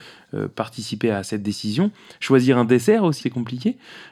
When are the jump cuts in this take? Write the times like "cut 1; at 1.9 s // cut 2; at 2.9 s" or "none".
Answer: cut 1; at 3.2 s

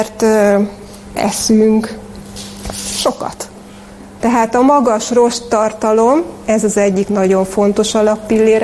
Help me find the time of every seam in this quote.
cut 1; at 1.1 s // cut 2; at 4.2 s

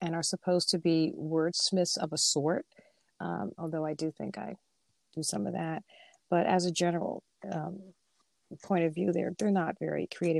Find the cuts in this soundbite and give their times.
cut 1; at 3.5 s

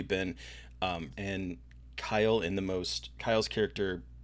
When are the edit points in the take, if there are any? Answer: cut 1; at 1.1 s

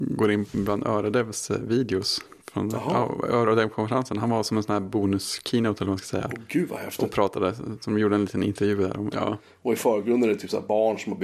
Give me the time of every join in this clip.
cut 1; at 9.1 s

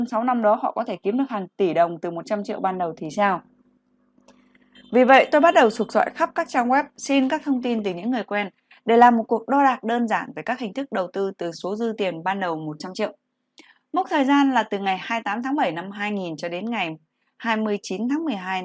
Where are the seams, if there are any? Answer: none

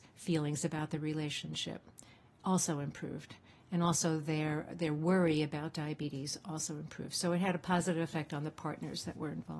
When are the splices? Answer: none

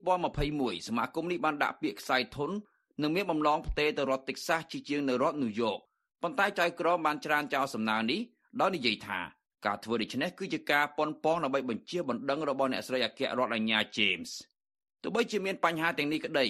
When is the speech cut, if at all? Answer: none

